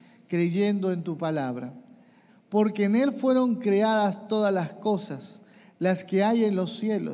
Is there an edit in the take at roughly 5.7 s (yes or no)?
no